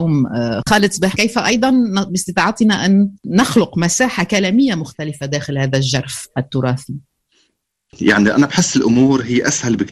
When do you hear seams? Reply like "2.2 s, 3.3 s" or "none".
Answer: 3.2 s